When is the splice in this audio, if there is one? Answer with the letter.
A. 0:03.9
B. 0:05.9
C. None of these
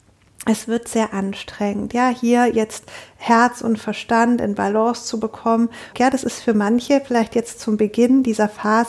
B